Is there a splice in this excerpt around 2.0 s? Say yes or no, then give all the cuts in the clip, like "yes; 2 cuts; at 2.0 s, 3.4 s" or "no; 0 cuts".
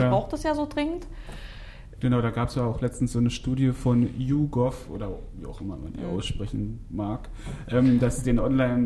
yes; 1 cut; at 2.0 s